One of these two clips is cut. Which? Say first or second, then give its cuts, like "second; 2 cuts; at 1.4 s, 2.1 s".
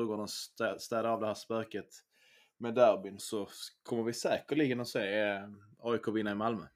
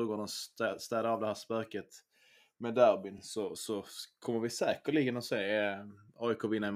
first; 1 cut; at 3.2 s